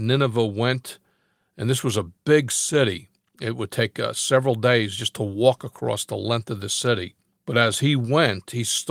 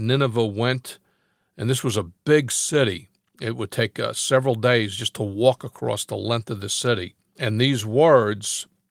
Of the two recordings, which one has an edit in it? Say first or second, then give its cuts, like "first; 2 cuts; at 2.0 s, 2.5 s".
second; 1 cut; at 7.4 s